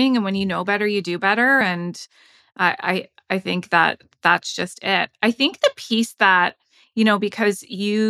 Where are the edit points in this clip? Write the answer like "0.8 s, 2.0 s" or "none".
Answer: none

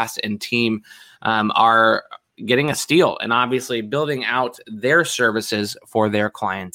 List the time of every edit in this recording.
none

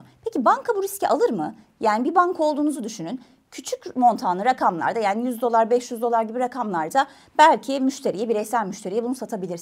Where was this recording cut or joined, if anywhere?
none

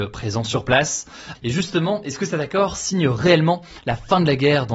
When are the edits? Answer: 1.3 s

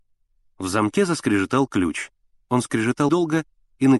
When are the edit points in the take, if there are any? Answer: 3.1 s

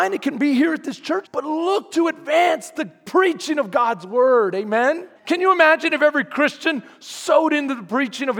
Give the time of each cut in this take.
1.2 s, 5.2 s

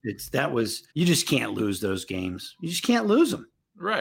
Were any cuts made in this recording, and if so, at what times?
0.9 s

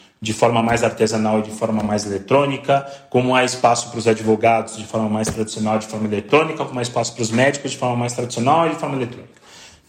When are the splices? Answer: none

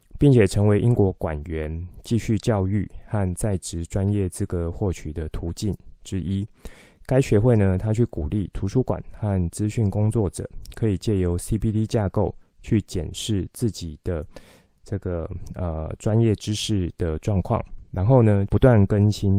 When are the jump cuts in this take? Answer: 18.5 s

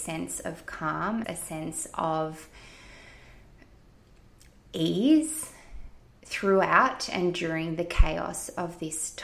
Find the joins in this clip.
1.2 s

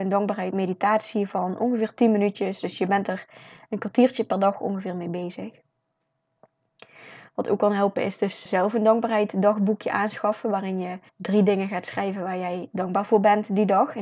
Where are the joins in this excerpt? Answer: 8.5 s, 11.1 s

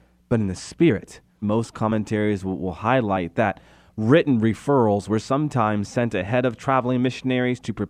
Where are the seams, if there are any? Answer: 1.4 s

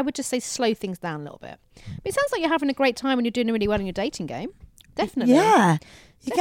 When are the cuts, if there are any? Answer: none

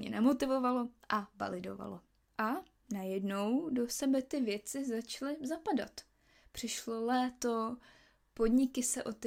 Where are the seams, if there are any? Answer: none

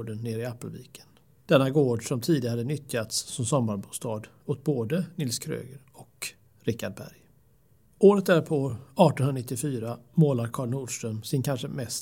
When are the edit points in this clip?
none

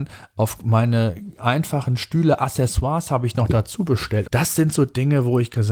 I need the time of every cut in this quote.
4.2 s

